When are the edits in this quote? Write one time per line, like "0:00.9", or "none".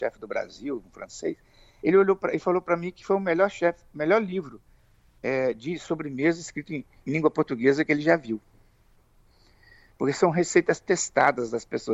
none